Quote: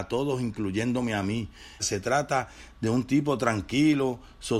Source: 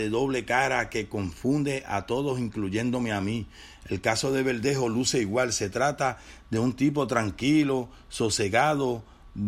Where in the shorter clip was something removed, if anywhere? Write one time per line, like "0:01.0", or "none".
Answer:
0:01.8